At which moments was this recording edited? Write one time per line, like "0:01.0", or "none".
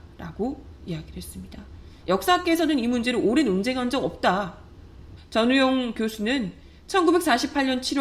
0:02.0
0:05.2